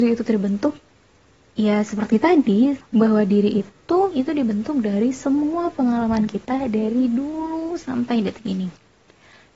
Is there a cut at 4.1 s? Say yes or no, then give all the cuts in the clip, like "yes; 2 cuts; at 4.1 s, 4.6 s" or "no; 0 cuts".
yes; 2 cuts; at 2.8 s, 4.1 s